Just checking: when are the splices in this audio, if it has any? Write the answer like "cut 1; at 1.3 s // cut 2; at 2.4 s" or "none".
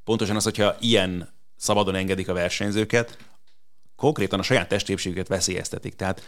none